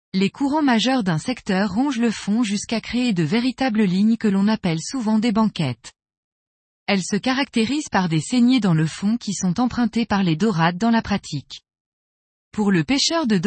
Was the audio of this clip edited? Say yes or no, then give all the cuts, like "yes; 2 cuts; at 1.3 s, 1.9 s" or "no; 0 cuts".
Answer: yes; 1 cut; at 12.4 s